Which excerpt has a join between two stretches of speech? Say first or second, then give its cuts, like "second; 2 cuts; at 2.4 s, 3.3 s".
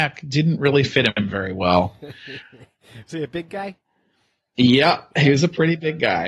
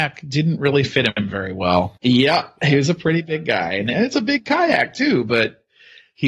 second; 1 cut; at 2.0 s